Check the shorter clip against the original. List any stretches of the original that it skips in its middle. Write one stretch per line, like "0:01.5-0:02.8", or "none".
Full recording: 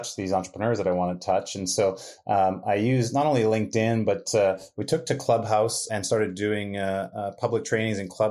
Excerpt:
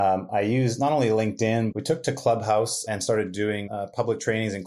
0:04.0-0:04.7
0:06.7-0:07.1

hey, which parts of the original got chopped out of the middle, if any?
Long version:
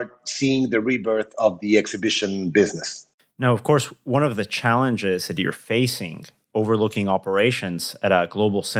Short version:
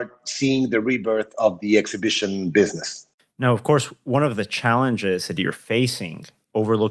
none

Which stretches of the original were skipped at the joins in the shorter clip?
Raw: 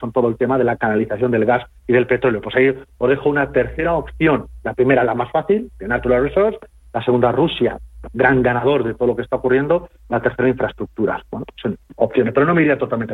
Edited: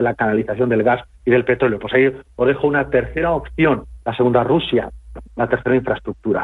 0:04.6-0:06.9
0:08.1-0:10.0

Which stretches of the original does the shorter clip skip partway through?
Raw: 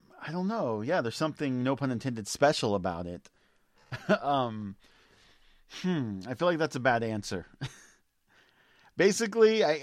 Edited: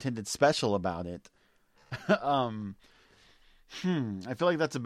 none

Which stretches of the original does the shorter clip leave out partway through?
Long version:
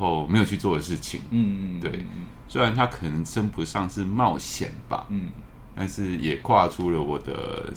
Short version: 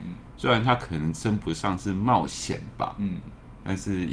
none

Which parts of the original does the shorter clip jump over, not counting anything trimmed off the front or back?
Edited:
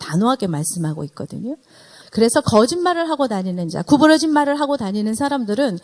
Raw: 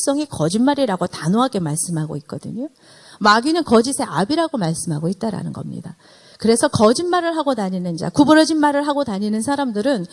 0:03.1-0:06.3

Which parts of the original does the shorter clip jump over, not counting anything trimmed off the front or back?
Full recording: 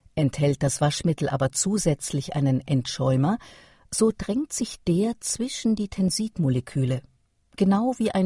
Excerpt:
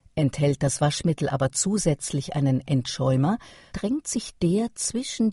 0:03.7-0:04.1

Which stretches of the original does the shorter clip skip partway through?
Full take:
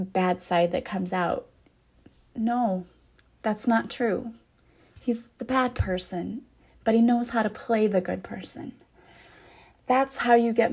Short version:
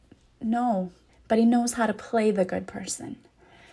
0:03.0-0:06.6

